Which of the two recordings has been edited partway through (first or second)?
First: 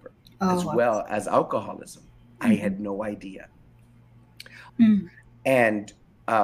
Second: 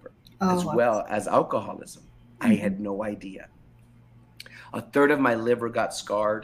first